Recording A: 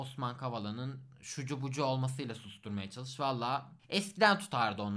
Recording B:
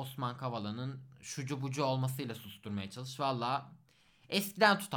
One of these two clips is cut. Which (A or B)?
A